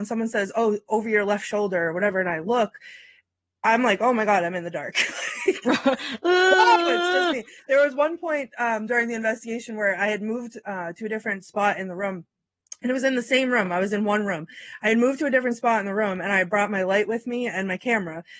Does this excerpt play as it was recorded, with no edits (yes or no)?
yes